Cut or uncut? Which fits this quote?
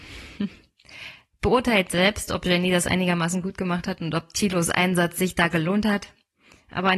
uncut